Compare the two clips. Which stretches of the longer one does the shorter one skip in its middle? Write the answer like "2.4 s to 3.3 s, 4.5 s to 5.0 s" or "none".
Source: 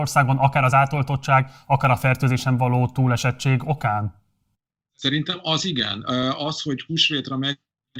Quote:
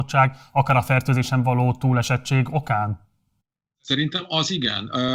none